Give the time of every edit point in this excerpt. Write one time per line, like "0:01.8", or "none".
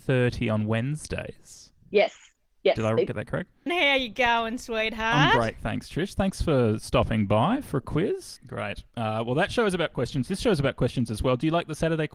0:03.7
0:08.4